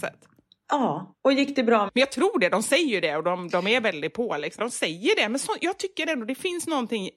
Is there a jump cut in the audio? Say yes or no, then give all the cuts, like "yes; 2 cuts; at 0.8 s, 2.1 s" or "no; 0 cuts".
yes; 2 cuts; at 1.9 s, 4.6 s